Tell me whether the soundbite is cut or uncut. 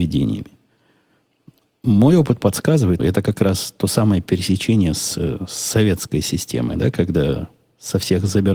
cut